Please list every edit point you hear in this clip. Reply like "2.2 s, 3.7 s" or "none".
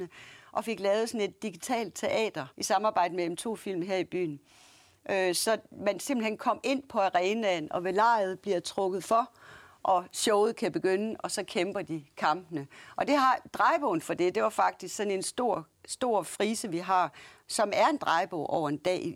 2.5 s